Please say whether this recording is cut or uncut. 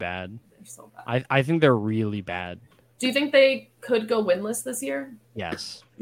uncut